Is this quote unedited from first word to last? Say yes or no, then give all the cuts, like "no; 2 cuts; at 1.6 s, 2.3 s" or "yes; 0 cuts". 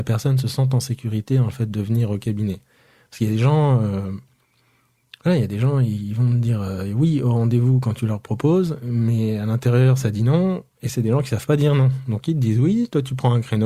yes; 0 cuts